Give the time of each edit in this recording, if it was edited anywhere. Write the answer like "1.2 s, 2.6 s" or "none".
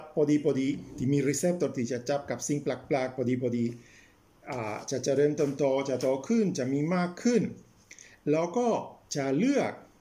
9.0 s